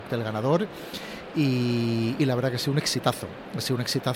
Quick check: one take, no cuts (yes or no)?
yes